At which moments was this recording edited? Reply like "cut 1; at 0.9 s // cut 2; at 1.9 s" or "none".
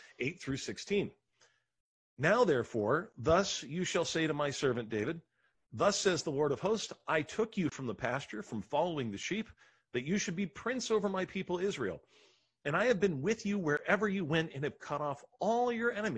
none